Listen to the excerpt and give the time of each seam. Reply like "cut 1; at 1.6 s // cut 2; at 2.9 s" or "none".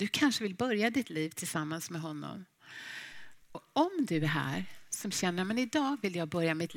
cut 1; at 3.5 s